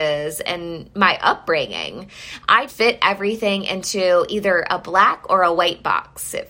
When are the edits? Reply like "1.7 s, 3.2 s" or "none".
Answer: 2.7 s